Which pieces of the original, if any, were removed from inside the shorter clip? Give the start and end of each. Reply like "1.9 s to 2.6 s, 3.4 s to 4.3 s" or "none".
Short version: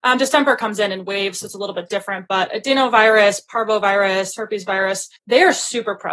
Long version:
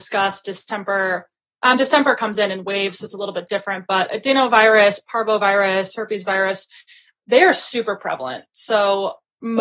6.8 s to 7.2 s

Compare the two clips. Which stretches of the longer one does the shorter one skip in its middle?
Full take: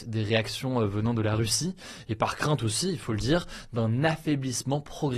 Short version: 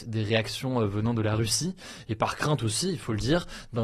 none

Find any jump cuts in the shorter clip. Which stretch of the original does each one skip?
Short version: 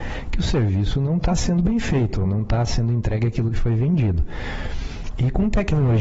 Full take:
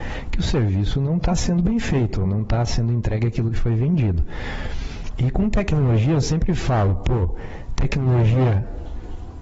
none

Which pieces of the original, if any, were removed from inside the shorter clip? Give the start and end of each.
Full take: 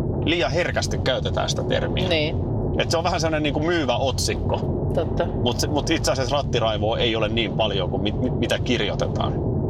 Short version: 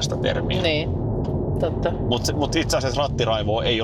2.7 s to 4.6 s

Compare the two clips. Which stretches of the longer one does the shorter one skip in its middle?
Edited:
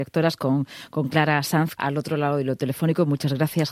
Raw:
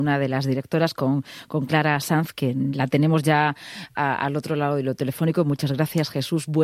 2.3 s to 4.2 s

